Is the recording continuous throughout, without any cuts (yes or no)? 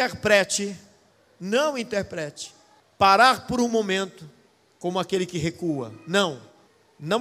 yes